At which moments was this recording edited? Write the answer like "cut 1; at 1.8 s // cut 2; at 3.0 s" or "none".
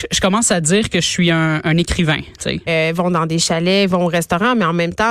cut 1; at 2.7 s

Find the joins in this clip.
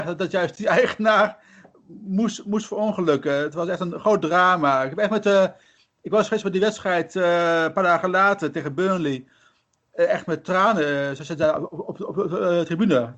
none

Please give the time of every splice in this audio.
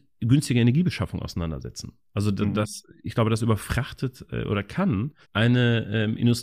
cut 1; at 5.2 s

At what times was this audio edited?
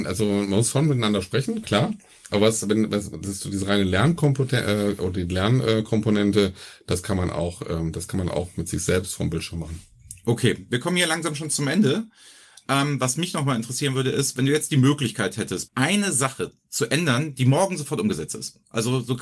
cut 1; at 15.7 s

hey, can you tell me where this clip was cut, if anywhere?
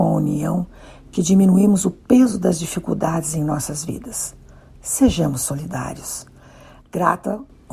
none

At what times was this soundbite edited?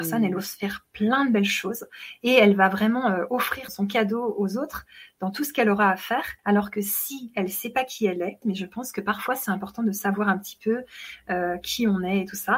cut 1; at 3.7 s // cut 2; at 6.4 s // cut 3; at 8.4 s

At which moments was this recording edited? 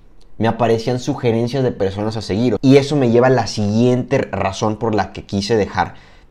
cut 1; at 2.6 s

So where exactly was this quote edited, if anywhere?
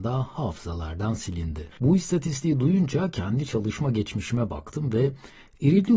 cut 1; at 1.7 s

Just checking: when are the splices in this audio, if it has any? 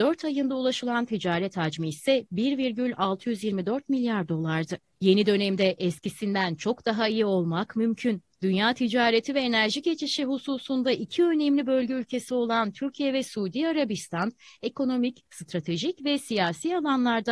cut 1; at 4.9 s

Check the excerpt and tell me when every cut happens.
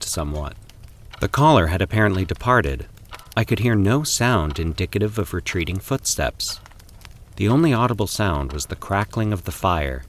cut 1; at 3.3 s

